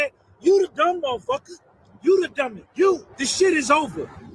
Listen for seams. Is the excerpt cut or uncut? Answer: cut